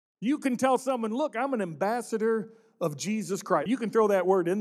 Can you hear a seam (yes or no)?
yes